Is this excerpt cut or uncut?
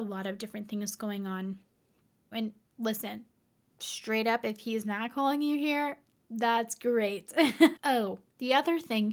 cut